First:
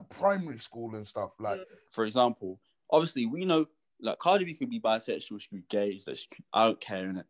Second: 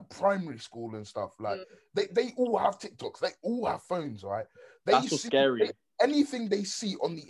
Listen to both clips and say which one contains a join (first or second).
first